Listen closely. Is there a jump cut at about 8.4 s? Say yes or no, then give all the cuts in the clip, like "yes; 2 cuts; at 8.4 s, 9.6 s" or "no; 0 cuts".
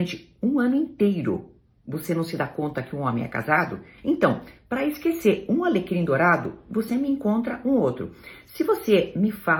no; 1 cut; at 4.0 s